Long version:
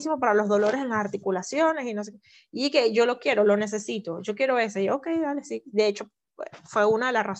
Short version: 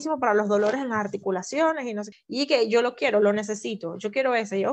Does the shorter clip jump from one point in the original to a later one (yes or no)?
yes